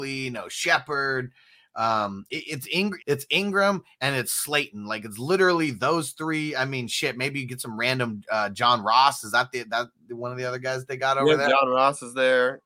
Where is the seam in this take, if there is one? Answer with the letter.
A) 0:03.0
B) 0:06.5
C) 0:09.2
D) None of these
A